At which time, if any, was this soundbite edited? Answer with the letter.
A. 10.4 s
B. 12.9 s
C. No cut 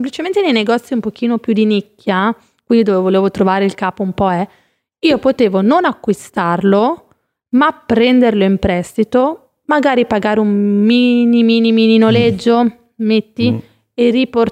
C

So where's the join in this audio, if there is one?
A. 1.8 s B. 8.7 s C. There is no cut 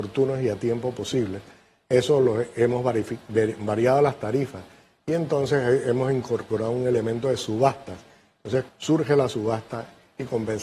B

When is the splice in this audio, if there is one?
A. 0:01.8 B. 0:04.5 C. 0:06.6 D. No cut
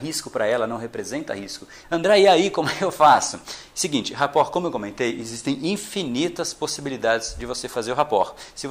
A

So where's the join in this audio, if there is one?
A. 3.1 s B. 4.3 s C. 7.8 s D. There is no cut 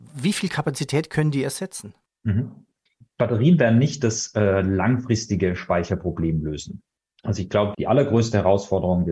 D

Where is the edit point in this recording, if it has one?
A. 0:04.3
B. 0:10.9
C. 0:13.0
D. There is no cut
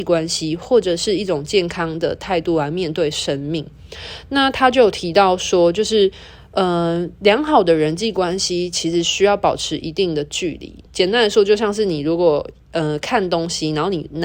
D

